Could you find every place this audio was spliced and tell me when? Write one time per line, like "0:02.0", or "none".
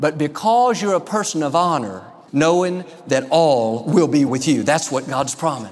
0:02.3
0:04.3